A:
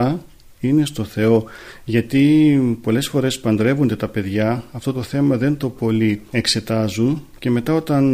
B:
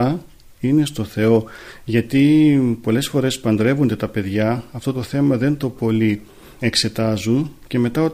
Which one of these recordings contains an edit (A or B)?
A